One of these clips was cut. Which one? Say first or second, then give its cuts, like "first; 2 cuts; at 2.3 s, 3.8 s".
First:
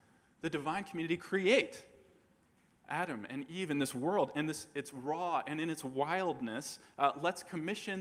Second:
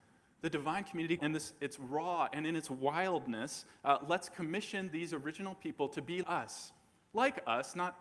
second; 2 cuts; at 1.2 s, 6.2 s